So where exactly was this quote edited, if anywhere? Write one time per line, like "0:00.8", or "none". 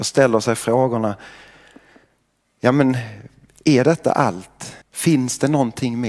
0:04.8

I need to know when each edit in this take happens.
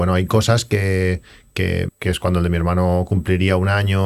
0:01.9

